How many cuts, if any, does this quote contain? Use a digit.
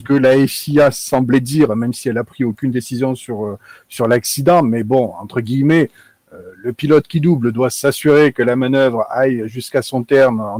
0